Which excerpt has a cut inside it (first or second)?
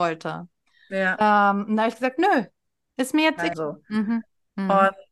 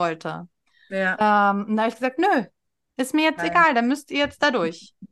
first